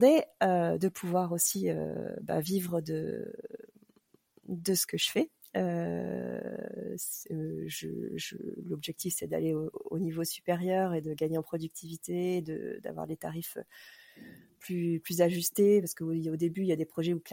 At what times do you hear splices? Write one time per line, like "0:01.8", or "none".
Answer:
none